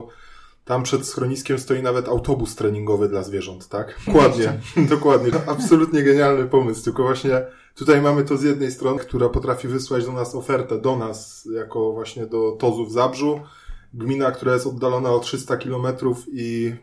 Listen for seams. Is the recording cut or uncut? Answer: cut